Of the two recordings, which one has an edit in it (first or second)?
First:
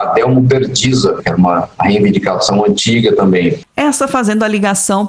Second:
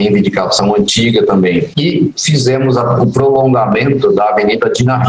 first